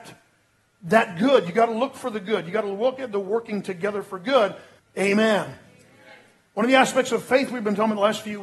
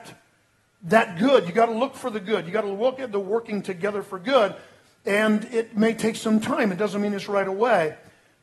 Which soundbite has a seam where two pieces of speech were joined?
first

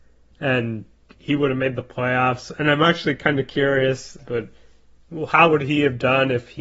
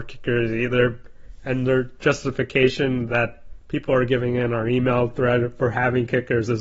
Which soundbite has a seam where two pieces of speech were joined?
first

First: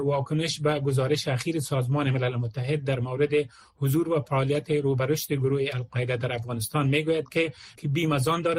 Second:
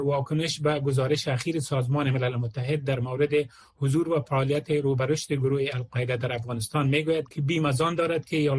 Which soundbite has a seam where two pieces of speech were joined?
second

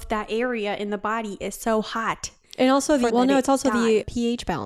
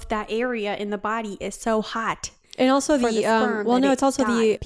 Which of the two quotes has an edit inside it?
first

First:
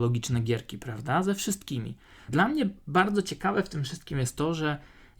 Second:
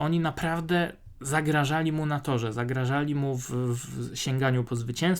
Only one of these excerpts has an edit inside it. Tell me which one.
first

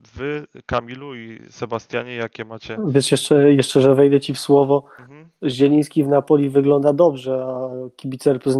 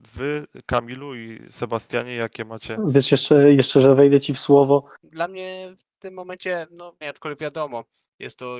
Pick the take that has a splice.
second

